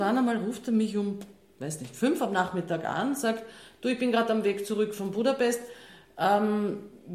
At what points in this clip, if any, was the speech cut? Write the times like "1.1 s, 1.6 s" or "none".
none